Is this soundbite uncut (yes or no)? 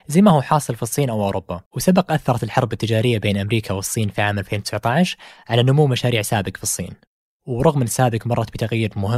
no